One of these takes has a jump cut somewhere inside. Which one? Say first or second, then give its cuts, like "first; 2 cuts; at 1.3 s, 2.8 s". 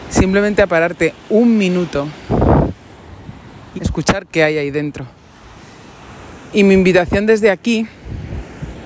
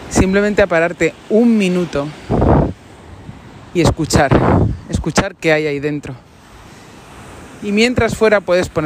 first; 2 cuts; at 3.8 s, 6.5 s